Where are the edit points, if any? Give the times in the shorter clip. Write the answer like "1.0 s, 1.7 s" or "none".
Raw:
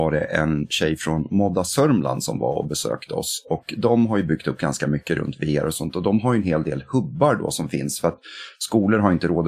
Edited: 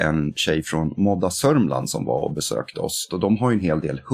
3.1 s